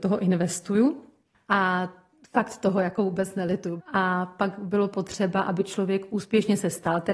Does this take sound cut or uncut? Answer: cut